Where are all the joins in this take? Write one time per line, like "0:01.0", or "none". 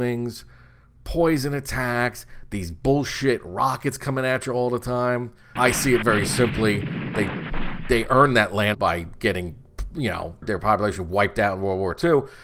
0:05.6
0:08.7
0:10.4